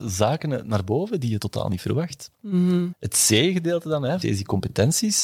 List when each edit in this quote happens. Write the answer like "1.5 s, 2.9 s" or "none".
2.9 s, 4.2 s